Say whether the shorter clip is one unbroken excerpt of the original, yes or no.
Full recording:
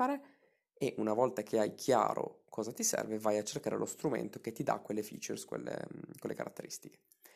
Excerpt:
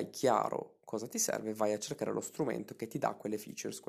yes